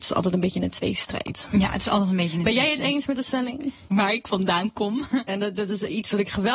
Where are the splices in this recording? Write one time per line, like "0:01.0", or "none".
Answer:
0:03.9
0:05.3